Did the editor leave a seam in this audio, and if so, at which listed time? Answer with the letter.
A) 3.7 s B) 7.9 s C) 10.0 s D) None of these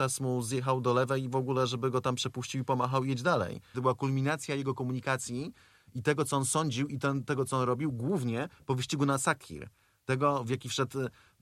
A